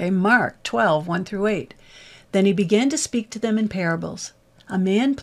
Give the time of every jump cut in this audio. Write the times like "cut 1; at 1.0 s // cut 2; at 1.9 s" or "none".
none